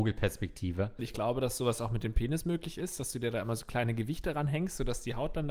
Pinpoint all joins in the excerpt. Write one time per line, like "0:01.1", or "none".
0:01.0

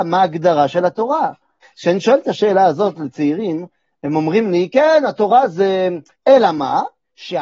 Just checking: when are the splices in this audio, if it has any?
0:01.6
0:06.2

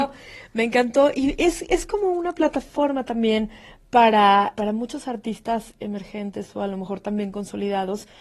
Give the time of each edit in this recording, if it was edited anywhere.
0:04.5

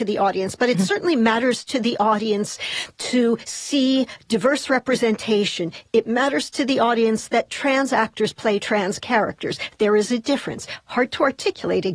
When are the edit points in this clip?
none

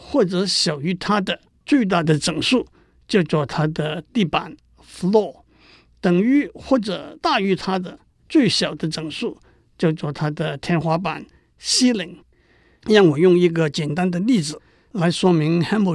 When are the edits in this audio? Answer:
none

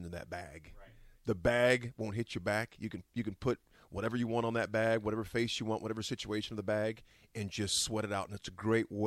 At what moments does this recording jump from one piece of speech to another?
0:01.1

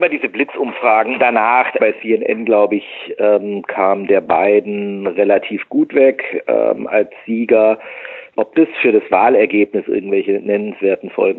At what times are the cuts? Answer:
0:01.8
0:08.3

